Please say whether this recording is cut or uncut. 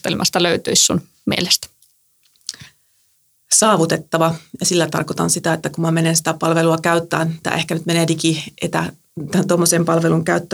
uncut